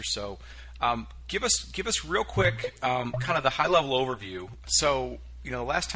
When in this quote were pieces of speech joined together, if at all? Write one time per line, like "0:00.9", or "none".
0:04.6